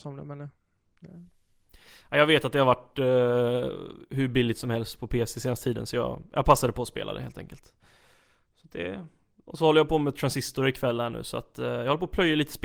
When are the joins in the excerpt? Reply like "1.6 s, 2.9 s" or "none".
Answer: none